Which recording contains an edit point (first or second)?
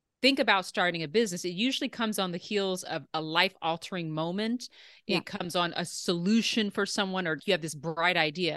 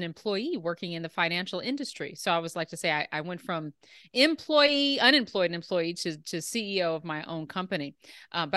first